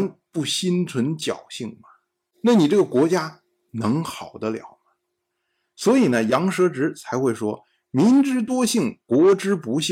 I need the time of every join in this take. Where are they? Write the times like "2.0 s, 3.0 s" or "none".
none